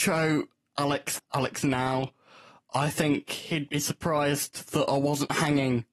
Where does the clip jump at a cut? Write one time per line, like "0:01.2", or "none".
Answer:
0:01.2